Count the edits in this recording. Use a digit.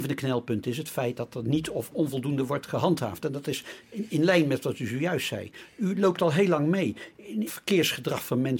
1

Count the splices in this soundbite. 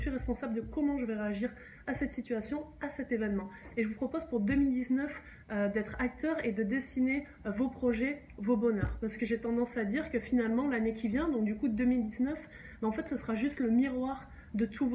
0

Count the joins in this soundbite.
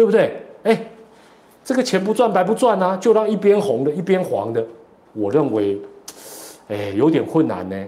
1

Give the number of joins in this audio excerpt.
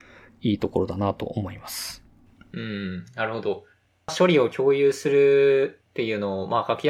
0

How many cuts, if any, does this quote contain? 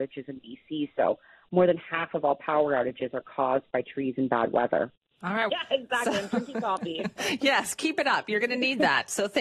1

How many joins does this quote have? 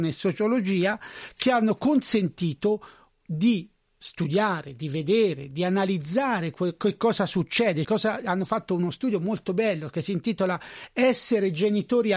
1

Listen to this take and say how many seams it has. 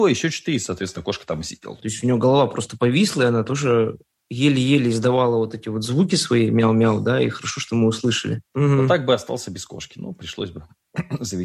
2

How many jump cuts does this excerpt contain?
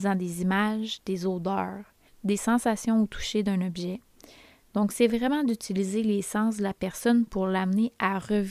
1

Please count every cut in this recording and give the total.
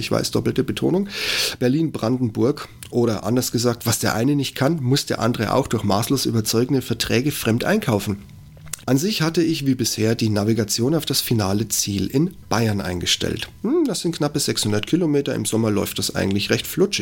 1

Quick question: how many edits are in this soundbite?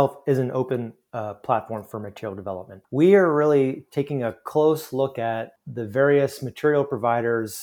0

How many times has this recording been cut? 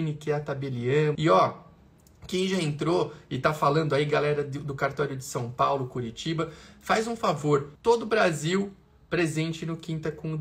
2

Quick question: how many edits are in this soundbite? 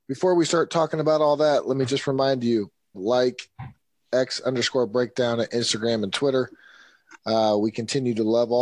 1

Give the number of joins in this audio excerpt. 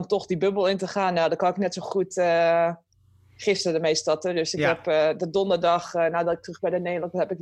0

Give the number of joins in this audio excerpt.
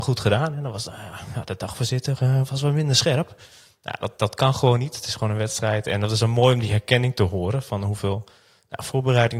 0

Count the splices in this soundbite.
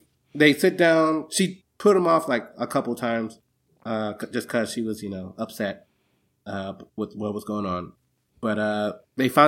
0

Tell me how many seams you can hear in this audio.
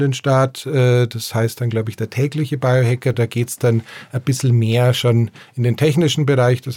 0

